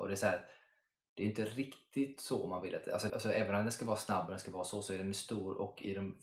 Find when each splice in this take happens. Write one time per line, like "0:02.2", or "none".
0:03.1